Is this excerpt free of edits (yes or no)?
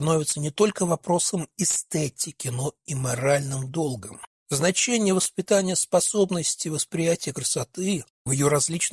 no